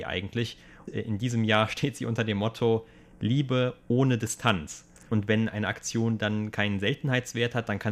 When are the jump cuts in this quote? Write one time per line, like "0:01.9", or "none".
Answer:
0:05.1

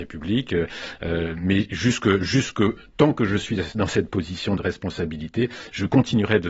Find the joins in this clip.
none

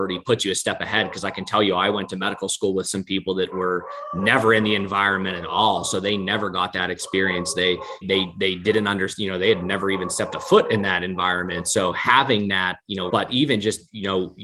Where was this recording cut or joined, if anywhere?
0:08.0
0:13.1

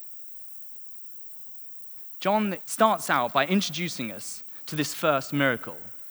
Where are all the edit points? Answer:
0:02.6

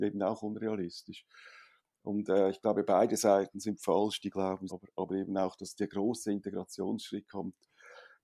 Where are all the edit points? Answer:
0:04.7

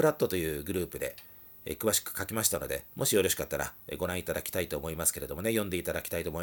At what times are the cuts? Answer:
0:02.9

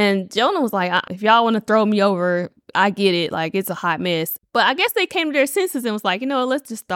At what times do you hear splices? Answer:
0:01.1
0:04.4

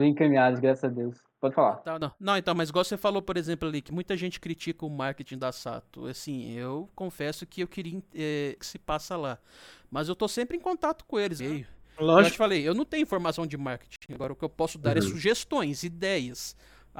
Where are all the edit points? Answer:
0:08.6
0:11.4

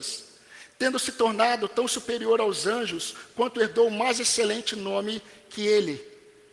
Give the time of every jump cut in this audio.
none

